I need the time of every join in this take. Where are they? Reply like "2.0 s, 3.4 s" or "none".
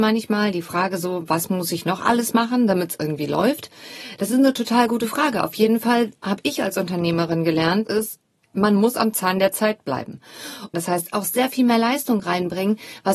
7.8 s, 10.7 s